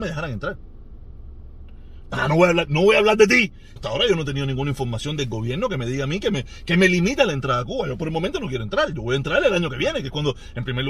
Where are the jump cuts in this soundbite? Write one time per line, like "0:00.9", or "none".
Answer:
0:02.0
0:03.8